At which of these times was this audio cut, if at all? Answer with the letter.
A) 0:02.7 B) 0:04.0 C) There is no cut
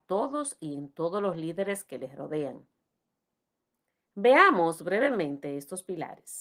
C